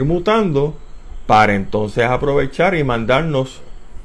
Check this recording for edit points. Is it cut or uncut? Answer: uncut